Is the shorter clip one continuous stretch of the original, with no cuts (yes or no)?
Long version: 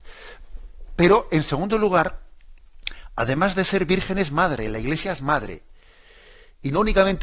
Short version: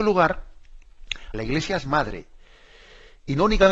no